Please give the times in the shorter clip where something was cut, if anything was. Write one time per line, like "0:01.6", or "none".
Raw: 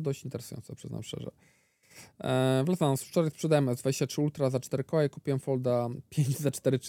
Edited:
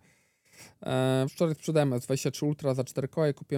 0:01.3